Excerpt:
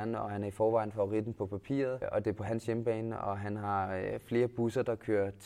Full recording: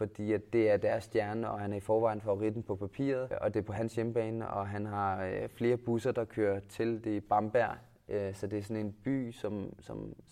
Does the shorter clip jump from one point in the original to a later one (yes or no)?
no